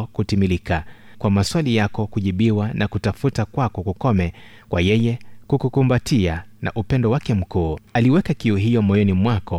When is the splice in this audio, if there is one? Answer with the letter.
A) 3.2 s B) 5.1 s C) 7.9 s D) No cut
C